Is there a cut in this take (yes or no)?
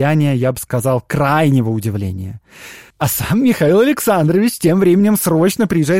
yes